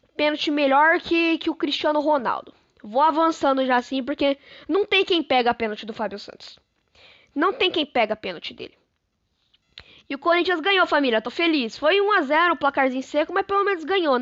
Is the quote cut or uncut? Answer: uncut